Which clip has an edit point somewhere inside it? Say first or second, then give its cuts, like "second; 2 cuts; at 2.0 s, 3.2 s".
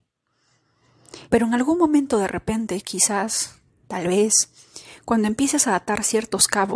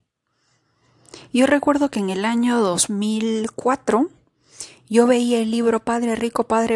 first; 1 cut; at 1.3 s